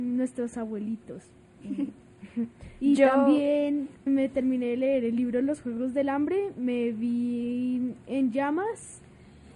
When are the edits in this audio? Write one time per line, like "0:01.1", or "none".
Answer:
0:04.1